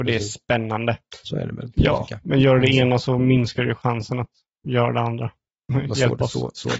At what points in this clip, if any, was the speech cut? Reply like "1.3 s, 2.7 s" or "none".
1.2 s, 5.6 s